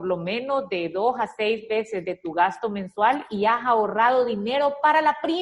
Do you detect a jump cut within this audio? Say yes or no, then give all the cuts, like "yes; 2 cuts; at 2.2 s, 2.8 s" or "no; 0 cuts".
no; 0 cuts